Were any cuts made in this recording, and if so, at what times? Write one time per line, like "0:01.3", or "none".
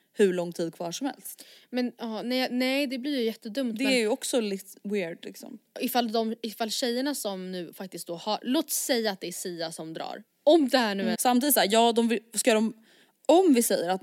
0:11.1